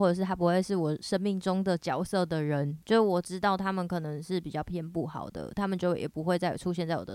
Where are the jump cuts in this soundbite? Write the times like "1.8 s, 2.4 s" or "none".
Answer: none